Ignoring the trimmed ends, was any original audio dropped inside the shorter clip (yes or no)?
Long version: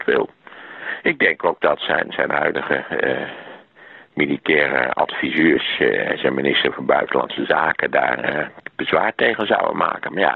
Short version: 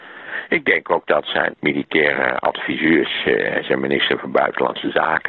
yes